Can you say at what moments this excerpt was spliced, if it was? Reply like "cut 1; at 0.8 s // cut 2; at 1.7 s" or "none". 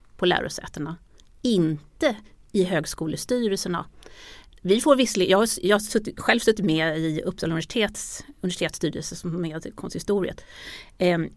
none